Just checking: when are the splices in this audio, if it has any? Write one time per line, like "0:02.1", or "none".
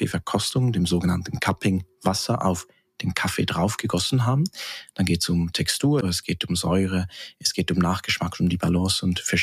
0:06.0